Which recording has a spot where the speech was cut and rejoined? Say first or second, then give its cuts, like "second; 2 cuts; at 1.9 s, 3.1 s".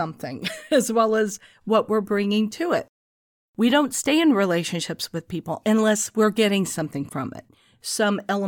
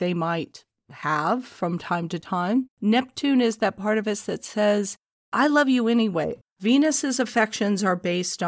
second; 2 cuts; at 2.7 s, 6.4 s